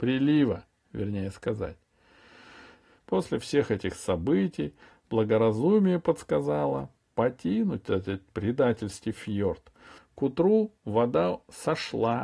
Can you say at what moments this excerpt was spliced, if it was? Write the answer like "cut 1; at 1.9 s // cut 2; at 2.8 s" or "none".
cut 1; at 3.0 s // cut 2; at 10.0 s